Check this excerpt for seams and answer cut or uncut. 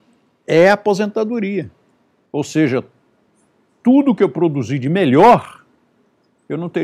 cut